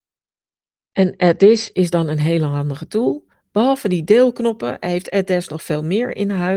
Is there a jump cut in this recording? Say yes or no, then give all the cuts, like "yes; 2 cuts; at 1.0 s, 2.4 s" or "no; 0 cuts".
no; 0 cuts